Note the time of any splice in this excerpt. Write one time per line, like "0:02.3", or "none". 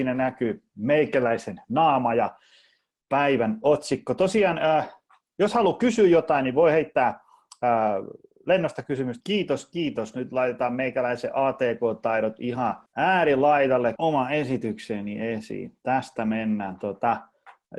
0:09.2
0:12.9
0:14.0